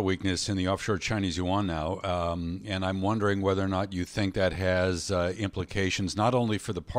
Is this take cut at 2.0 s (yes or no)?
no